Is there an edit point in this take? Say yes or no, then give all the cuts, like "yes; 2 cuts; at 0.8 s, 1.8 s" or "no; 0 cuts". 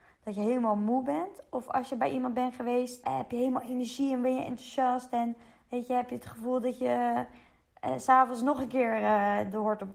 yes; 1 cut; at 3.0 s